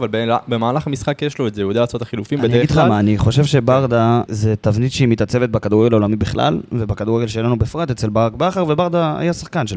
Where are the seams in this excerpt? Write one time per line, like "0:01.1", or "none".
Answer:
0:04.3